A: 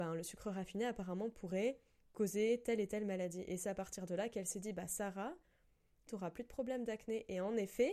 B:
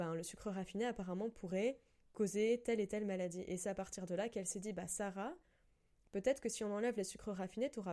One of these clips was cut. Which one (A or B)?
A